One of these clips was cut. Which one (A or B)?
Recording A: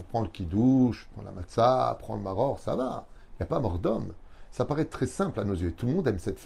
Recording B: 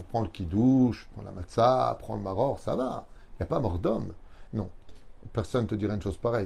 B